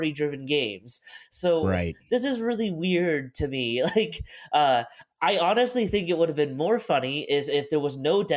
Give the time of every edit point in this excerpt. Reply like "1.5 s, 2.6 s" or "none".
5.1 s